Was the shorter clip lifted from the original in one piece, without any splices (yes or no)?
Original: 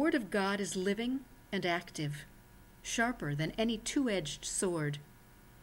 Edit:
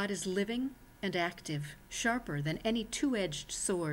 no